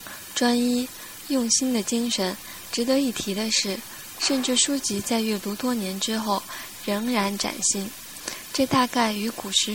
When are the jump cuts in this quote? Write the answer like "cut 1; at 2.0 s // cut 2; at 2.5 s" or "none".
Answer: cut 1; at 2.7 s // cut 2; at 4.2 s